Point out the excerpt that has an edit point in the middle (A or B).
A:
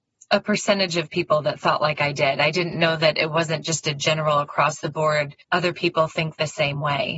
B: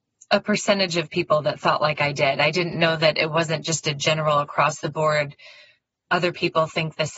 A